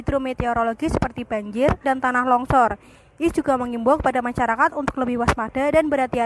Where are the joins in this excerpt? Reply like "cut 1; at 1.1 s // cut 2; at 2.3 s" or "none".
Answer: cut 1; at 1.8 s

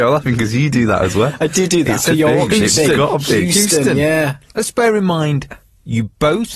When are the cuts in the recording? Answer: cut 1; at 2.1 s

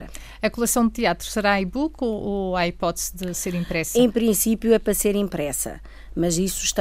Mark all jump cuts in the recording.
none

